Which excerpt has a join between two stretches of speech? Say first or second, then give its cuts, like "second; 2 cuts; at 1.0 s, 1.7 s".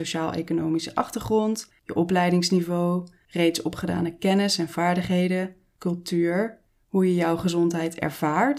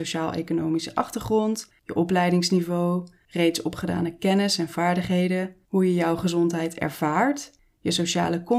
second; 1 cut; at 5.7 s